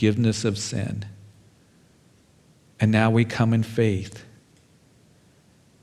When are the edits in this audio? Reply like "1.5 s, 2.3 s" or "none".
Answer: none